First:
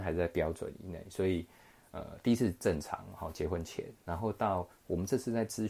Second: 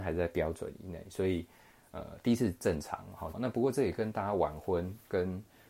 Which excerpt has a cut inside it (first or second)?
second